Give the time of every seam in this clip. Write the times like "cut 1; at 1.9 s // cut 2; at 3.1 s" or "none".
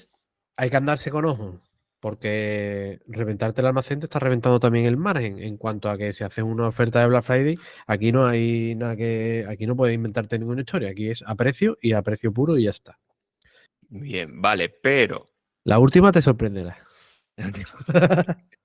cut 1; at 13.7 s